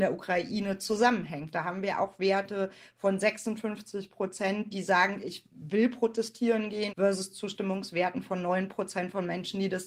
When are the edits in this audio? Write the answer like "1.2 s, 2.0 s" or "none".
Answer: 4.7 s, 6.9 s

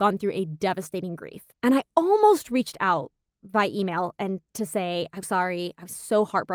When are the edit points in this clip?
1.5 s, 5.2 s

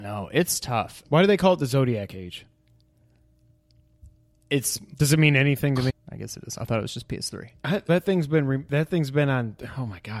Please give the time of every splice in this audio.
1.0 s, 5.9 s, 7.9 s

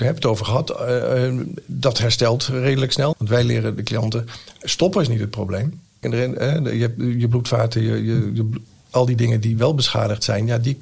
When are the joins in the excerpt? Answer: 3.1 s, 6.0 s

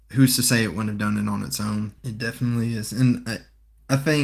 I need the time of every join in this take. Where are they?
2.0 s

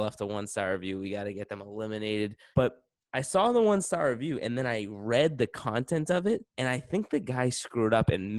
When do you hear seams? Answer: 2.5 s, 6.5 s

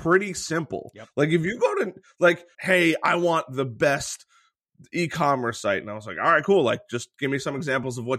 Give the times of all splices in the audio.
2.5 s

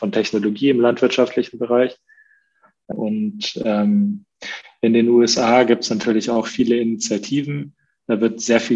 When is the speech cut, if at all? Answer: 2.9 s

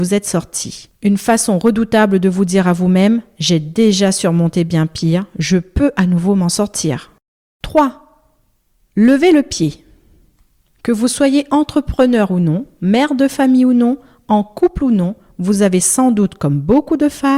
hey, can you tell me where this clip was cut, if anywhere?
none

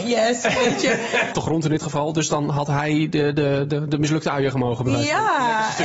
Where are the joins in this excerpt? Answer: 1.3 s

